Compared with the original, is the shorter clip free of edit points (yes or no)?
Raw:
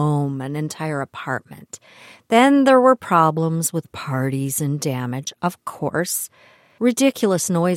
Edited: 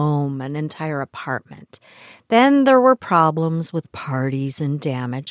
yes